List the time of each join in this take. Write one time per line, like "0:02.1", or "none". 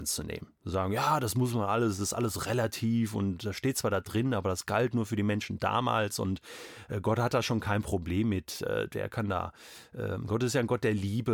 none